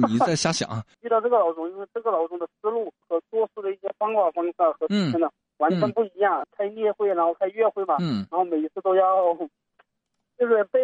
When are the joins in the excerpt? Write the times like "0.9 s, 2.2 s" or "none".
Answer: 0.9 s, 3.0 s, 6.4 s